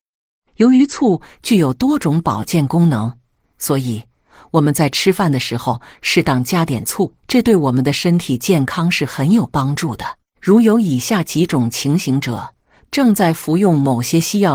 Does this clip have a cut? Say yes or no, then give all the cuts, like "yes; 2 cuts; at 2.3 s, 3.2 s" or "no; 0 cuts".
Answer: yes; 3 cuts; at 7.2 s, 10.3 s, 12.9 s